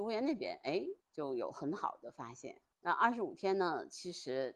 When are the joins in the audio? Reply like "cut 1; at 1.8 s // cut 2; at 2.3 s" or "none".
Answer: cut 1; at 1.0 s // cut 2; at 2.7 s